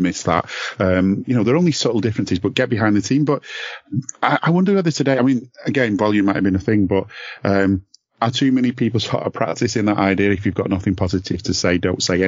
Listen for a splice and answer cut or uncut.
uncut